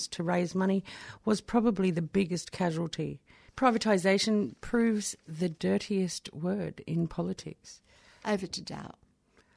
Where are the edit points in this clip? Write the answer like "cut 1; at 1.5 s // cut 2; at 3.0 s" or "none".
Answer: cut 1; at 3.5 s // cut 2; at 8.2 s